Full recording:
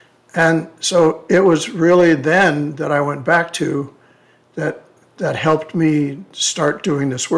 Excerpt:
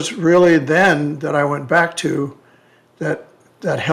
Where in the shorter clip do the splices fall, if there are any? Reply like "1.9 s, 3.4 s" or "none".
none